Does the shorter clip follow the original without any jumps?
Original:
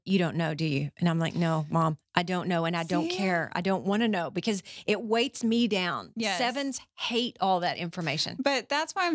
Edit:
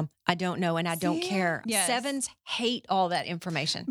no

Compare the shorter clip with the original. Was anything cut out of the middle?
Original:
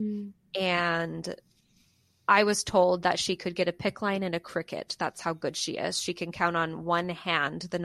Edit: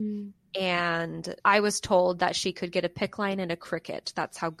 yes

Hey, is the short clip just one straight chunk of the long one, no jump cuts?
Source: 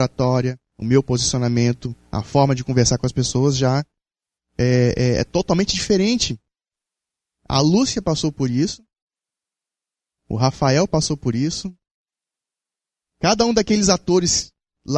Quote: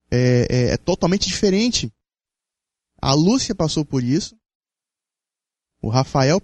yes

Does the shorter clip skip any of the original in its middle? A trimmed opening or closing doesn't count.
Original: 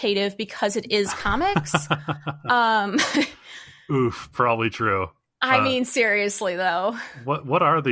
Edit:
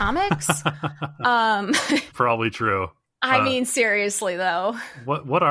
yes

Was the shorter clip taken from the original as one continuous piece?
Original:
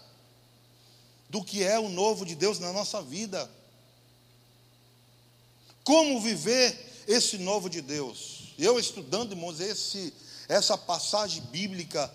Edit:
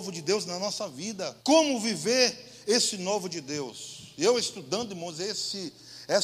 no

